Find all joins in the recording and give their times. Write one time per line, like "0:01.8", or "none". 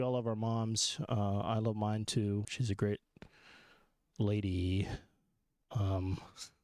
0:02.4